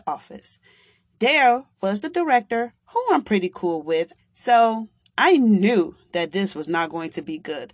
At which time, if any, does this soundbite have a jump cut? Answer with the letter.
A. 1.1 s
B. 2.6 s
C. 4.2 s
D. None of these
C